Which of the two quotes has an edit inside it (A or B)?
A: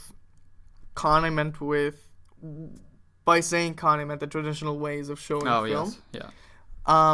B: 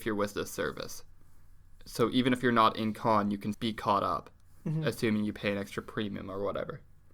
B